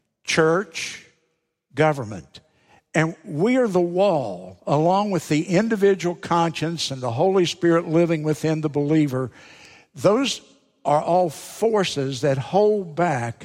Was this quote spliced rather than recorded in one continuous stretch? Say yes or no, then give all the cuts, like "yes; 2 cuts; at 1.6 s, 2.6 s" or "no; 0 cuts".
no; 0 cuts